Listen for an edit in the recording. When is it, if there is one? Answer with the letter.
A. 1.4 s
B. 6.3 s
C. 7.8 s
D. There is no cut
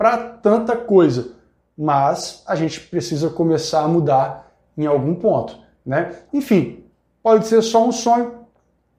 B